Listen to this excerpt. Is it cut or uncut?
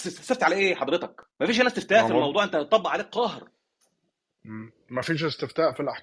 cut